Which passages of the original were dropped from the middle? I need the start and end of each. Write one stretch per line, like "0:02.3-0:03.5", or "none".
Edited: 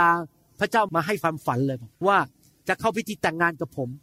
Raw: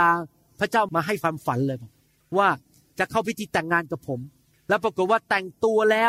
0:02.0-0:02.3